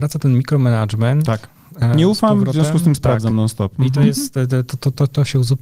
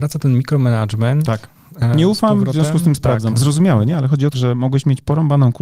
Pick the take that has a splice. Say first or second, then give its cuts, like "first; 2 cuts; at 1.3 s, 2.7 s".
second; 2 cuts; at 3.3 s, 4.3 s